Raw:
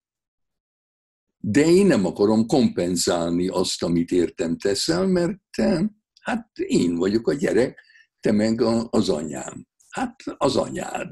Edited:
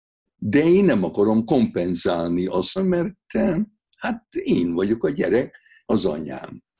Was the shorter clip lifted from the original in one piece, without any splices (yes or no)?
no